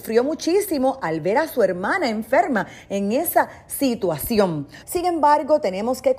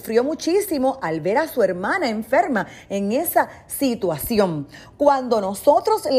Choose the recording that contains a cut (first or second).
first